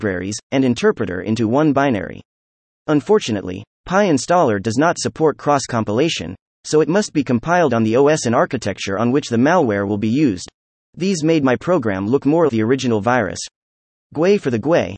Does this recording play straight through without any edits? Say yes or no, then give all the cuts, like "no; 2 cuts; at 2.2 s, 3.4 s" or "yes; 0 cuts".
no; 3 cuts; at 10.7 s, 12.5 s, 13.9 s